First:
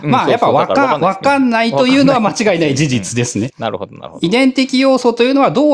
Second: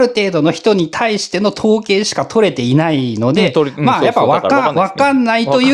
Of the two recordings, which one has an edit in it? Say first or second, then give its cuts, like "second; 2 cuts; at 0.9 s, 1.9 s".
first; 1 cut; at 3.5 s